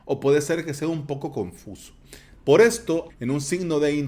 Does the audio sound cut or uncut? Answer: cut